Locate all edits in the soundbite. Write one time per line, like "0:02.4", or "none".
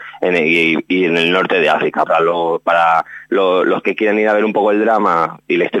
0:02.1